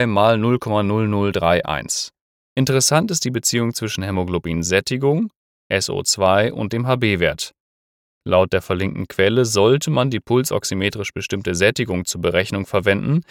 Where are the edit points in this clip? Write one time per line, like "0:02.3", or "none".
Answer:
0:02.5